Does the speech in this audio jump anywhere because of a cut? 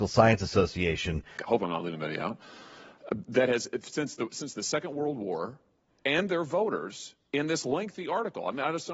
yes; 1 cut; at 1.4 s

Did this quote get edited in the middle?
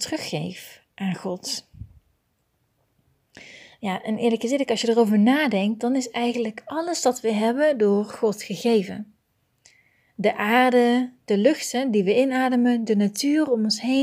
no; 0 cuts

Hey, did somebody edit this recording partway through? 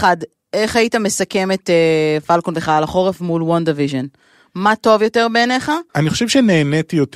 yes; 1 cut; at 5.9 s

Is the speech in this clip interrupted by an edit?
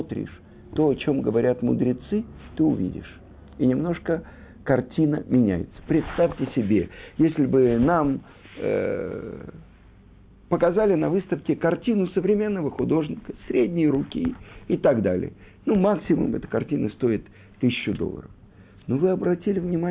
no; 0 cuts

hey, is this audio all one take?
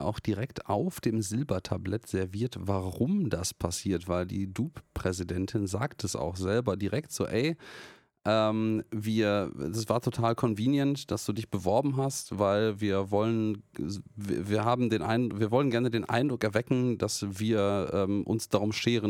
yes; 0 cuts

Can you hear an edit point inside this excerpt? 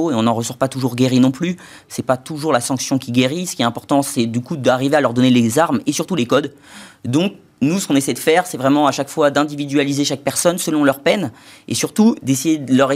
no; 0 cuts

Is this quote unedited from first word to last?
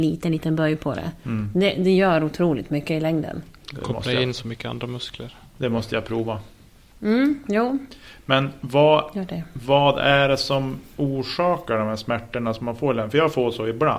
yes; 0 cuts

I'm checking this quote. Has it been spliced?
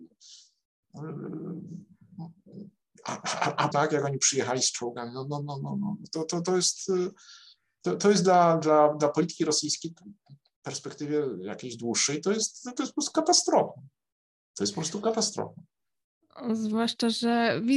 yes; 1 cut; at 3.7 s

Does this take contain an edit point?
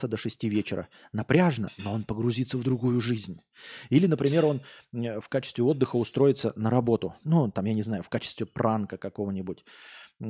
no; 0 cuts

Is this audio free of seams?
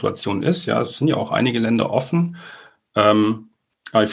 yes; 0 cuts

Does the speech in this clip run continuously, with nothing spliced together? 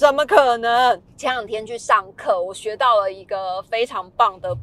no; 1 cut; at 1.0 s

